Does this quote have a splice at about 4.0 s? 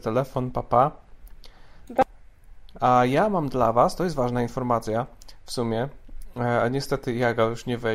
no; 1 cut; at 2.7 s

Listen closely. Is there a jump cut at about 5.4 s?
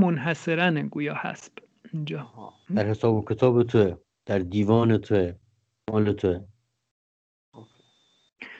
no; 1 cut; at 2.6 s

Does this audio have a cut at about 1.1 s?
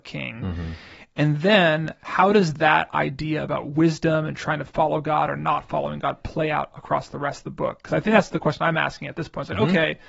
no; 0 cuts

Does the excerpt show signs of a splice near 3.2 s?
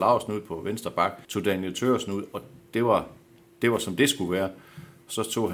no; 1 cut; at 1.2 s

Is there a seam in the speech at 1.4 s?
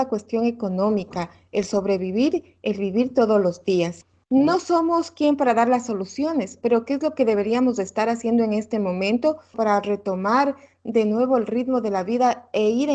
no; 0 cuts

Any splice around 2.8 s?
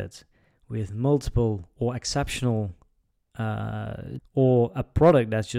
no; 1 cut; at 4.2 s

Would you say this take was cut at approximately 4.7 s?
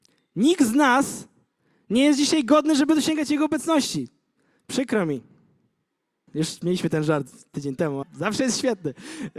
no; 2 cuts; at 6.3 s, 8.0 s

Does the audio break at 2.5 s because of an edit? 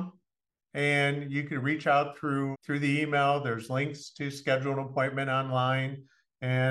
yes; 1 cut; at 2.5 s

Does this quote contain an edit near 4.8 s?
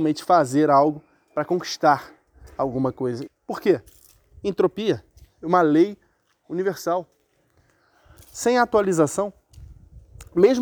no; 2 cuts; at 3.3 s, 8.2 s

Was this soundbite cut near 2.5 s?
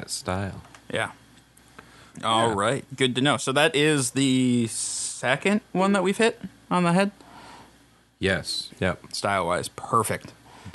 no; 1 cut; at 8.7 s

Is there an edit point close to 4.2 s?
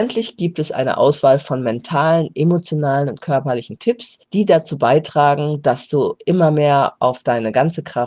no; 0 cuts

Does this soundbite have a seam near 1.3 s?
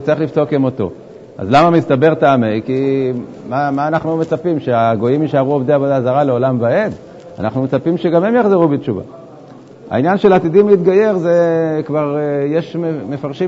no; 0 cuts

